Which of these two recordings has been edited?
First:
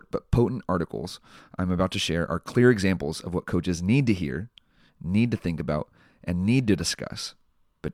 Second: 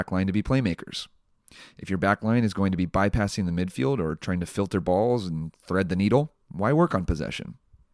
second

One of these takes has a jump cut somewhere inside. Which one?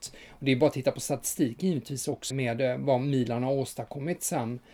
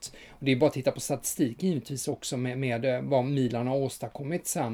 first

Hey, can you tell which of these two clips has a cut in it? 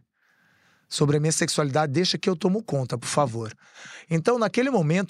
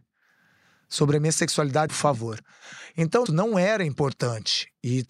second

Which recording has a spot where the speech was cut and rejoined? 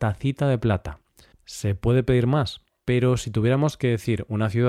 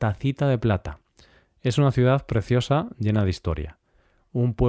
first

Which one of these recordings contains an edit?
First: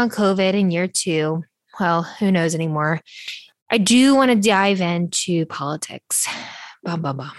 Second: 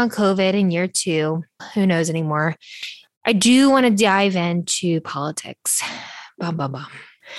second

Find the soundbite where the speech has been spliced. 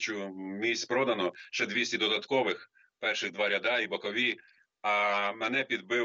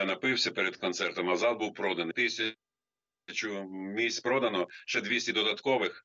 second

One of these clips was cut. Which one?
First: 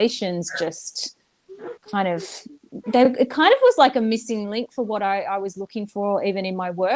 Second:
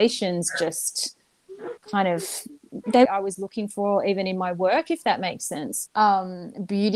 second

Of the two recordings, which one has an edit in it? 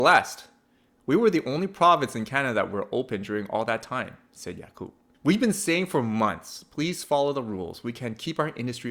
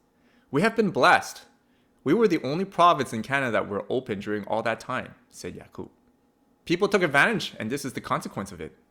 first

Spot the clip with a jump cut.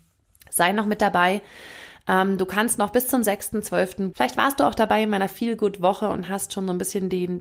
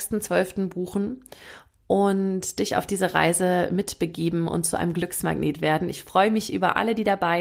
first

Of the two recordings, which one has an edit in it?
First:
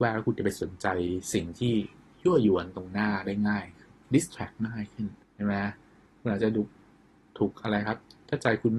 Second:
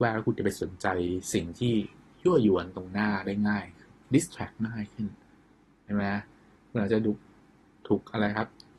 first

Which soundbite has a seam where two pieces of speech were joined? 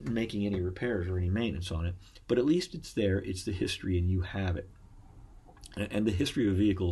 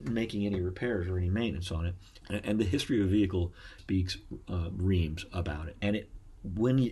second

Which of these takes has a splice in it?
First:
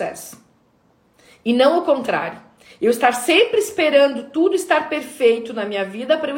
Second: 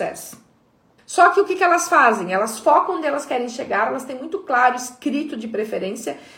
second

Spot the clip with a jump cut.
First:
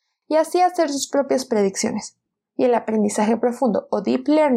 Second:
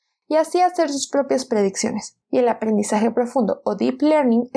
second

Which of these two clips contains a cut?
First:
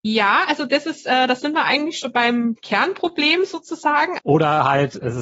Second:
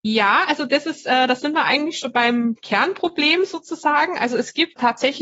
first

